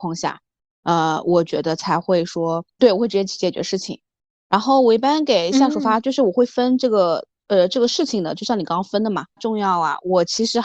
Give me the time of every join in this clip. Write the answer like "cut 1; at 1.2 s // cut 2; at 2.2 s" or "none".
cut 1; at 2.8 s // cut 2; at 9.4 s

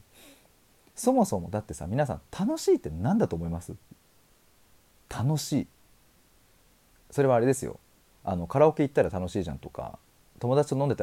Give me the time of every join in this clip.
none

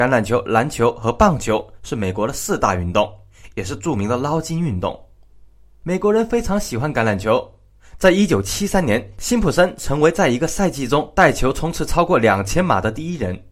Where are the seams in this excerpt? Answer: cut 1; at 8.0 s

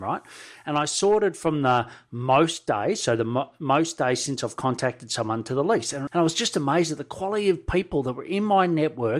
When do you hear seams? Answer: cut 1; at 6.1 s

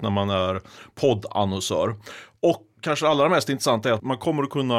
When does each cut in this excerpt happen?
cut 1; at 2.8 s

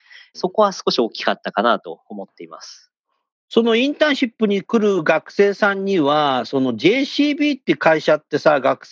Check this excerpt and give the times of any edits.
none

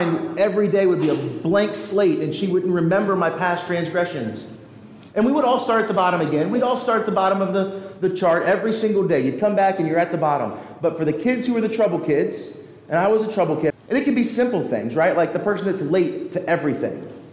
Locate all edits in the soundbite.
cut 1; at 13.7 s

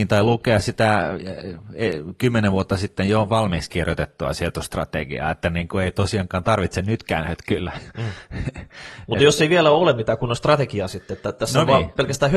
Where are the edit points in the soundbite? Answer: none

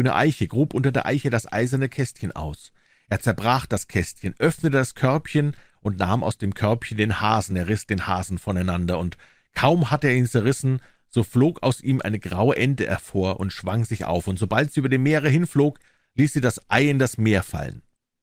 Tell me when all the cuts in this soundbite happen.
none

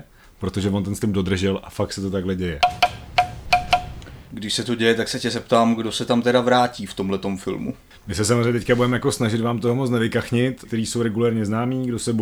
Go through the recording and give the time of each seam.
cut 1; at 7.9 s // cut 2; at 10.7 s

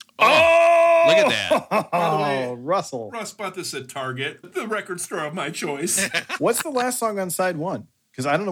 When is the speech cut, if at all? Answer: cut 1; at 4.4 s // cut 2; at 6.4 s

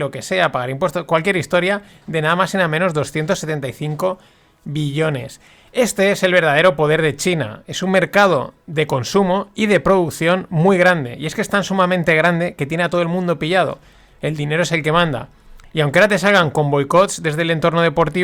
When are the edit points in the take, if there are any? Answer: none

